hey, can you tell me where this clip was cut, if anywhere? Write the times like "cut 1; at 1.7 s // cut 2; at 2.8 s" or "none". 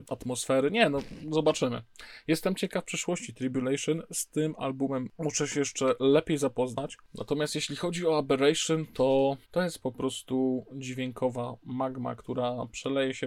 cut 1; at 9.4 s